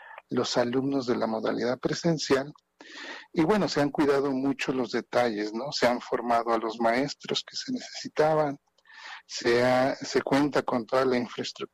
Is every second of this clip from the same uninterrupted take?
yes; 0 cuts

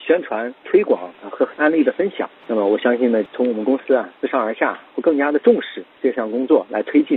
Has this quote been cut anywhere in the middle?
yes; 1 cut; at 3.3 s

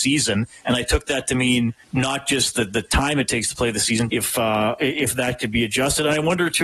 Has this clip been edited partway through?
yes; 2 cuts; at 1.8 s, 4.1 s

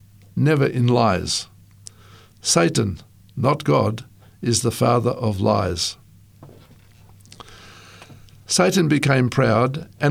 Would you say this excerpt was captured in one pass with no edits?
yes; 0 cuts

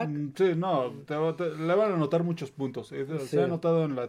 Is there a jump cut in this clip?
no; 0 cuts

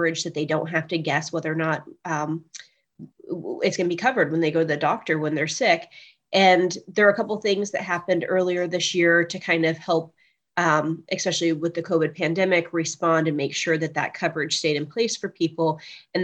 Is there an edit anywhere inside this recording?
no; 0 cuts

